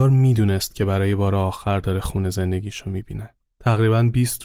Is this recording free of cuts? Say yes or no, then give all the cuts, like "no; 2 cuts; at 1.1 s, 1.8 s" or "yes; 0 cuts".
no; 1 cut; at 3.4 s